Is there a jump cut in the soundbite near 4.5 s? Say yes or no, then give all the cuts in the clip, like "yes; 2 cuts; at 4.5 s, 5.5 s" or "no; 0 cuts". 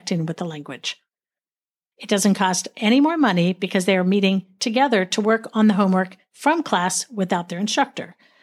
no; 1 cut; at 1.9 s